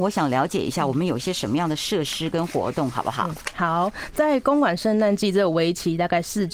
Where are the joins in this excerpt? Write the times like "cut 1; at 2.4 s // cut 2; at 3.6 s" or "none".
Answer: none